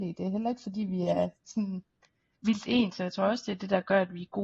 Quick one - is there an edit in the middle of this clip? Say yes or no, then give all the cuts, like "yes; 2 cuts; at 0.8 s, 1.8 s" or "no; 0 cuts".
no; 0 cuts